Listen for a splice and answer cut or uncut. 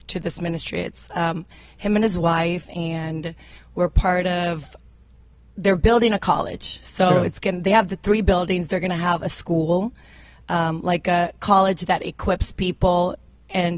uncut